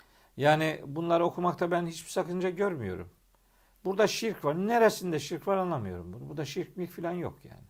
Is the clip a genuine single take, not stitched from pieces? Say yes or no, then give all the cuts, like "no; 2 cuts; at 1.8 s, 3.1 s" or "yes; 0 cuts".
yes; 0 cuts